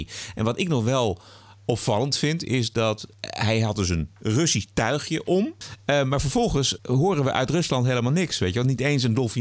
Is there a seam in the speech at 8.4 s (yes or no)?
no